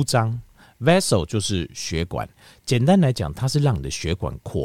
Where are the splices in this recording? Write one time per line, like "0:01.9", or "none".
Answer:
none